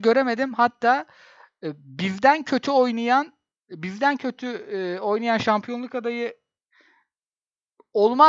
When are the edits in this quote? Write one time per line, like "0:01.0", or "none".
none